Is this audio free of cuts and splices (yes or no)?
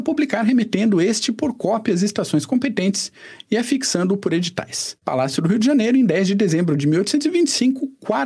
no